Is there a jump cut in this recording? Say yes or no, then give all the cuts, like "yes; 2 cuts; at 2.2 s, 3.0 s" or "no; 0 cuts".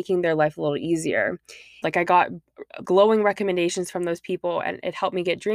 yes; 2 cuts; at 1.8 s, 2.8 s